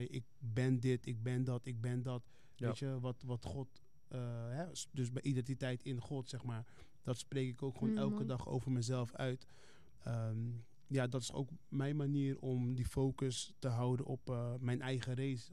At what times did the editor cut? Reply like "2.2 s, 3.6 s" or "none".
none